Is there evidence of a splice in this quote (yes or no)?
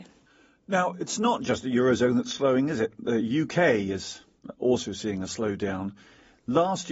no